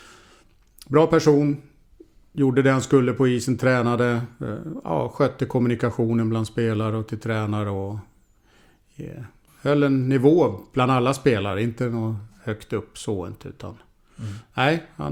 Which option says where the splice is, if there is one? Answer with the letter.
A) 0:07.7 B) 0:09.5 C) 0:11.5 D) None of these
B